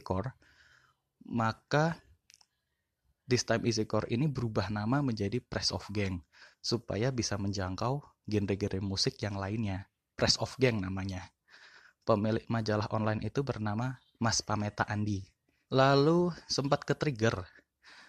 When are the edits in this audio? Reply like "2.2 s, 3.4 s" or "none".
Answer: 10.1 s, 15.7 s

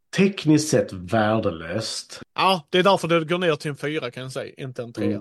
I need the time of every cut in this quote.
2.2 s

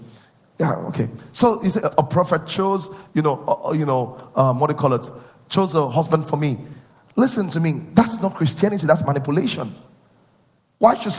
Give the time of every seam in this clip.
1.8 s

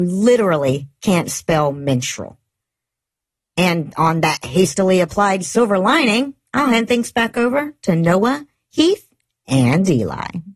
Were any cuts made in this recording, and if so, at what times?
none

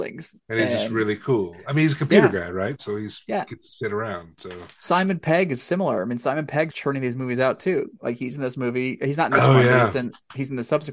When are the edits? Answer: 6.7 s

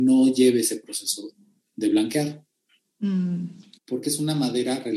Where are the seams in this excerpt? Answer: 3.7 s

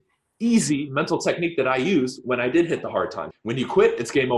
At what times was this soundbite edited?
3.3 s

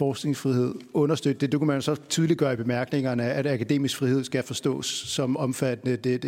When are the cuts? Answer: none

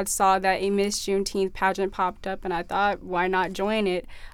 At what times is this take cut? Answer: none

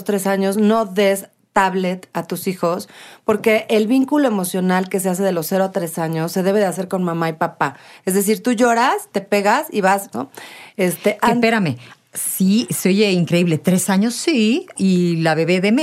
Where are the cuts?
10.1 s, 14.8 s

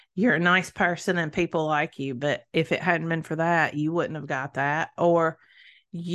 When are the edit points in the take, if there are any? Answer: none

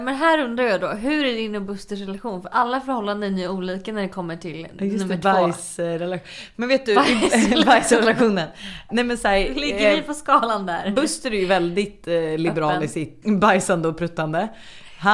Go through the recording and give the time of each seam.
8.9 s, 13.2 s

